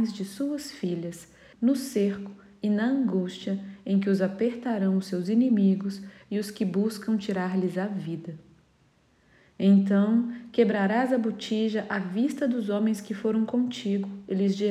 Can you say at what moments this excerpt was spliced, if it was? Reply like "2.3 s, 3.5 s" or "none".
1.5 s